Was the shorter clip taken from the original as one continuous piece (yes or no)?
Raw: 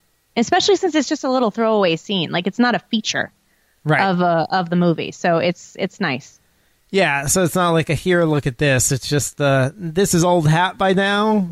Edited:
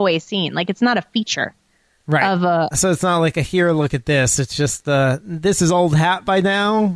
no